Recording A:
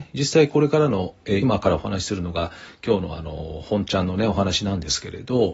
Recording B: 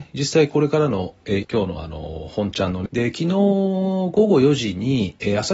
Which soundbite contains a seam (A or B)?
B